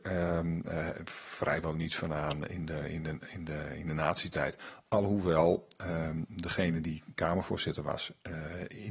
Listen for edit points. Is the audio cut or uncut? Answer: uncut